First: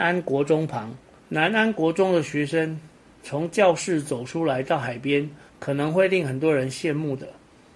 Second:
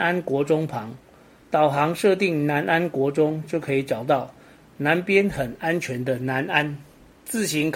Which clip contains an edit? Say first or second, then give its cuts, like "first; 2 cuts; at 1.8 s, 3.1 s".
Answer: first; 2 cuts; at 1.2 s, 5.5 s